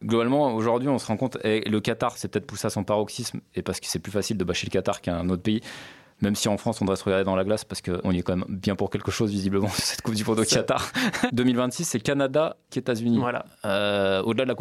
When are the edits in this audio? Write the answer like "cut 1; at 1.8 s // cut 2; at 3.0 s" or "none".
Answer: cut 1; at 11.3 s // cut 2; at 12.7 s